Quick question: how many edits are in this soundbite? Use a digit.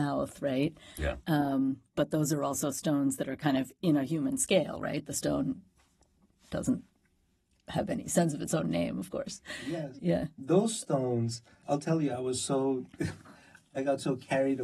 2